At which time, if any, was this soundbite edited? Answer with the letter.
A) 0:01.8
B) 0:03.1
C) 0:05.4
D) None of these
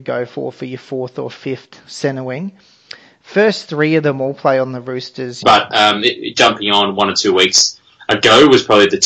C